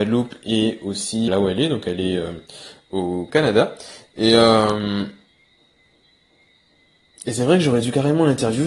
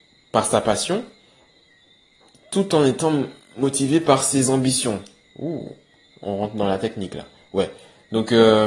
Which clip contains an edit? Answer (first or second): first